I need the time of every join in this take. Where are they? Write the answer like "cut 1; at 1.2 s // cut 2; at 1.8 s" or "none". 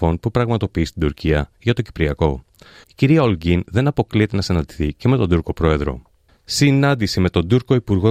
cut 1; at 2.8 s // cut 2; at 6.4 s

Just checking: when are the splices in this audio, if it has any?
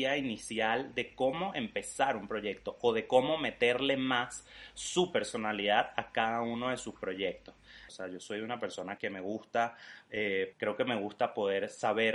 cut 1; at 7.9 s // cut 2; at 9.0 s // cut 3; at 10.5 s

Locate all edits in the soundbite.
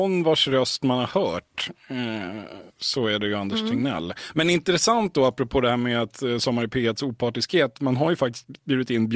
cut 1; at 2.7 s

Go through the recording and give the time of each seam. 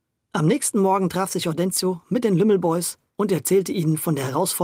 none

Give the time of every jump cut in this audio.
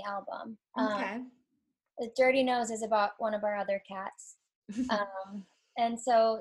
none

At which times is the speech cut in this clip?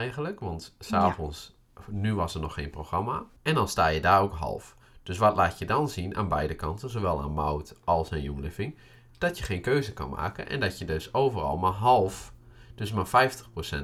cut 1; at 3.4 s

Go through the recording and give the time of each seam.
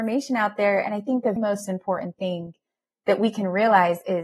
cut 1; at 1.4 s

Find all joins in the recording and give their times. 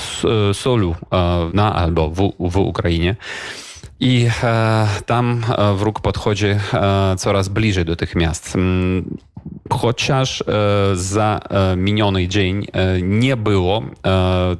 cut 1; at 1.5 s

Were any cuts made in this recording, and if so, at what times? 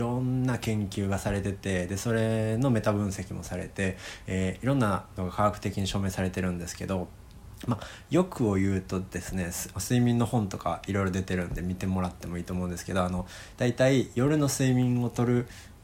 cut 1; at 9.7 s

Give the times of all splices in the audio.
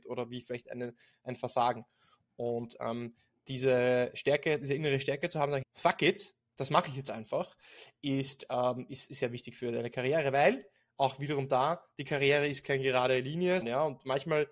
cut 1; at 5.6 s // cut 2; at 13.6 s

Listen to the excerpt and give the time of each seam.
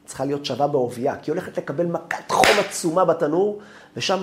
none

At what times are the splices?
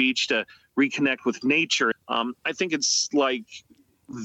cut 1; at 1.9 s

